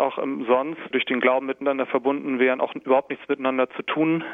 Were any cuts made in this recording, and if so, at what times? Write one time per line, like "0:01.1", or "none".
0:00.9